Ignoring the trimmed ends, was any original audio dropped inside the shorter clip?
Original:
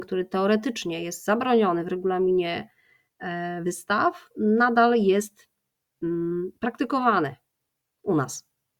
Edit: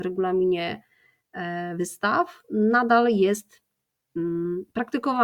no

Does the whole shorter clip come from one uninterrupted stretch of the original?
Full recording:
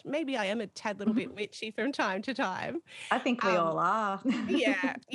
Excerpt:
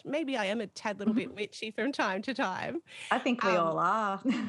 yes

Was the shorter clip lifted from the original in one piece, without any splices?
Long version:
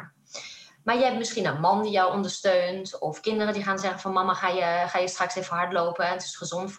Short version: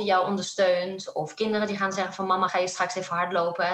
no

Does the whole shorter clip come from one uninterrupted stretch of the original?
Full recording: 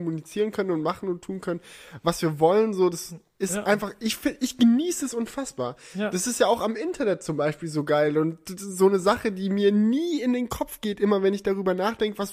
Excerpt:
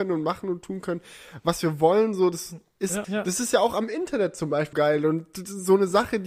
no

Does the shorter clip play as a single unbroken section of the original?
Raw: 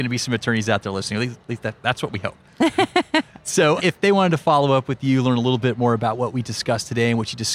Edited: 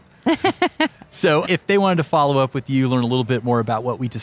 yes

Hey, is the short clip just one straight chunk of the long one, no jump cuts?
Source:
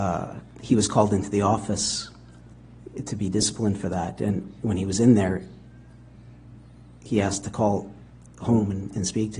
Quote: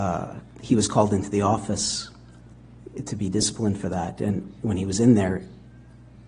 yes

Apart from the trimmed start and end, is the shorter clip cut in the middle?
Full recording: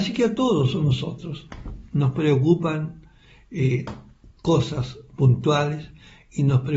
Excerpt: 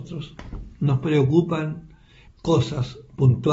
yes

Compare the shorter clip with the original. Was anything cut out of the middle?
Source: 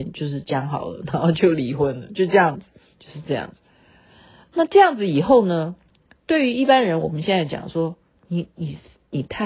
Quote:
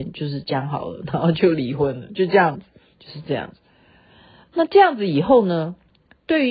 no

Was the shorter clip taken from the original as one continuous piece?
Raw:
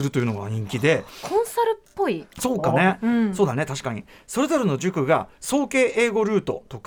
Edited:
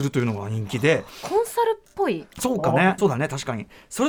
no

